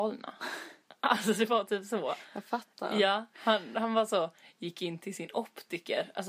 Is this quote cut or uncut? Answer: uncut